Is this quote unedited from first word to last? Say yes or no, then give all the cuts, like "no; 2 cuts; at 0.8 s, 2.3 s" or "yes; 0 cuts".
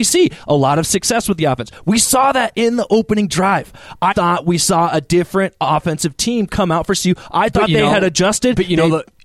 no; 1 cut; at 4.1 s